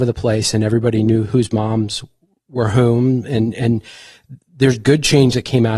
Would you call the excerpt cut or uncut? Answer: uncut